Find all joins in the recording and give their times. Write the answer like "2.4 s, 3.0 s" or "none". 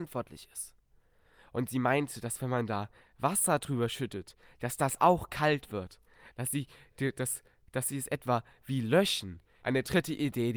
9.6 s